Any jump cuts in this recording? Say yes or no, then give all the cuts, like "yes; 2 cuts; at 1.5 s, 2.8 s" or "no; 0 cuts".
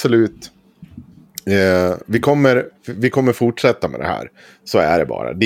no; 0 cuts